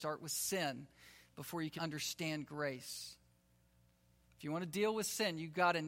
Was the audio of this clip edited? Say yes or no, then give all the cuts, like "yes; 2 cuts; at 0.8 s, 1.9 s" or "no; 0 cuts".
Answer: yes; 1 cut; at 1.8 s